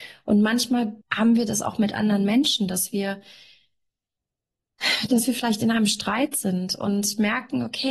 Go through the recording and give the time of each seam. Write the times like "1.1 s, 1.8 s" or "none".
1.0 s